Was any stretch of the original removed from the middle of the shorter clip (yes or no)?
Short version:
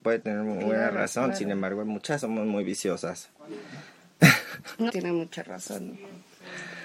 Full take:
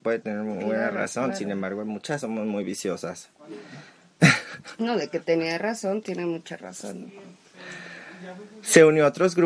yes